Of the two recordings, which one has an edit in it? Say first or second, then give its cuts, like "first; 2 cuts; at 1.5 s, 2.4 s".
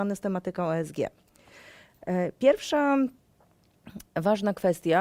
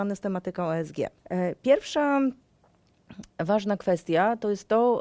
second; 1 cut; at 1.2 s